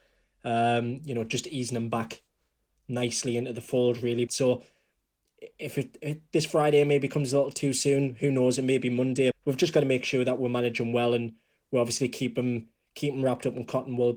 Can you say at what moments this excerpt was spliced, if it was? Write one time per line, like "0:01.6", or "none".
0:04.3
0:09.3